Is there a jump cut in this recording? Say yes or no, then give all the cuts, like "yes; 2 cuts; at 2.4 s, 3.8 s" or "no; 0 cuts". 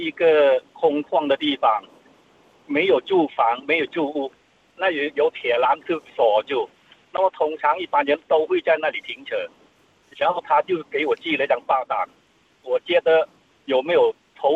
no; 0 cuts